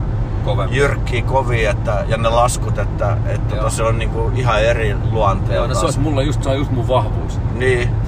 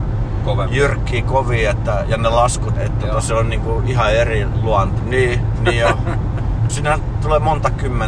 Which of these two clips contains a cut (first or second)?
second